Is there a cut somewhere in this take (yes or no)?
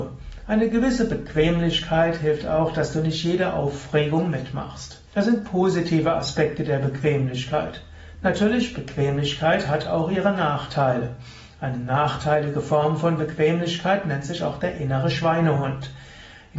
yes